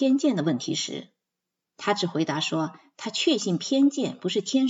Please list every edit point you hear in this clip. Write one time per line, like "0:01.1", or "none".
none